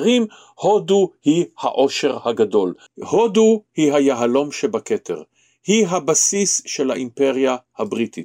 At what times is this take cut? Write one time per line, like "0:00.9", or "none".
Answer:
0:02.9